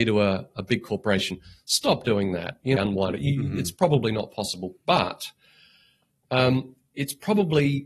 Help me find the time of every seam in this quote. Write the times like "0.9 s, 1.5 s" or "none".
2.8 s